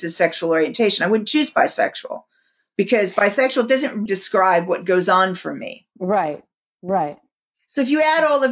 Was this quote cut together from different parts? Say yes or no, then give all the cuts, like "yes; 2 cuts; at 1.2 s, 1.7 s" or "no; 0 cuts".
yes; 2 cuts; at 4.1 s, 5.9 s